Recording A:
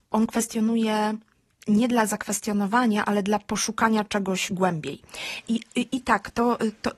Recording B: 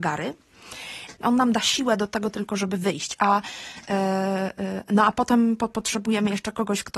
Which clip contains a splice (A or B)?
B